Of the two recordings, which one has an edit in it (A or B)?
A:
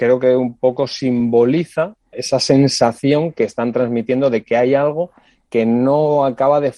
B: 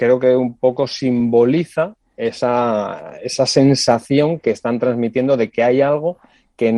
A